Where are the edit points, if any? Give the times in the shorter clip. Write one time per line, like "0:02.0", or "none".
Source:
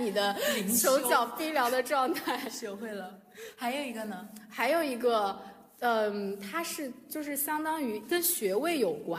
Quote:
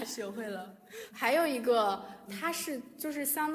0:01.1
0:02.3